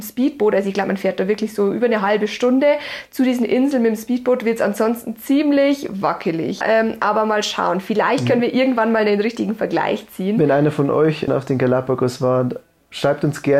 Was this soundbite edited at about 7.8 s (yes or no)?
no